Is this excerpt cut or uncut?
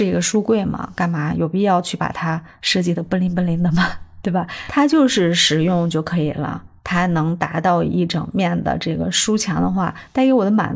uncut